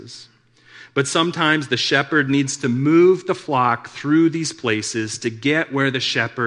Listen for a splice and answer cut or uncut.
uncut